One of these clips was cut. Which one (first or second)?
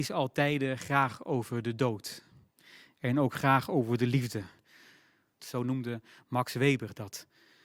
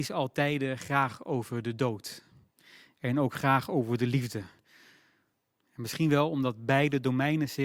first